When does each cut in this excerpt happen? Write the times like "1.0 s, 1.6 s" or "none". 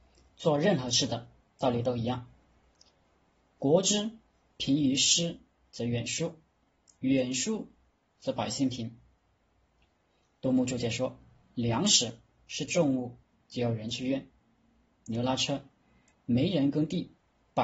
13.4 s, 16.1 s